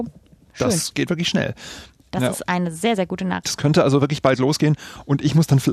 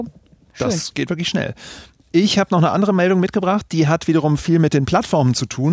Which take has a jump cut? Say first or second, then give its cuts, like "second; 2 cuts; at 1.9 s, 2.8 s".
first; 2 cuts; at 2.1 s, 3.4 s